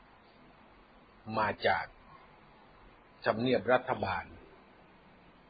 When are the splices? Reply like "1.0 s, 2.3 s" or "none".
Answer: none